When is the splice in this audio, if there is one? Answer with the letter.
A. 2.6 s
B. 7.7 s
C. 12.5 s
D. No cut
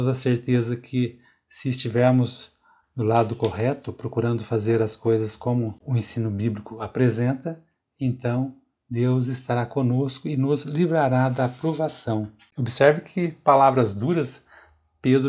C